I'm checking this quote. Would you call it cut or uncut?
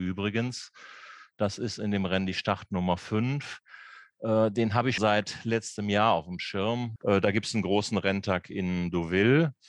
cut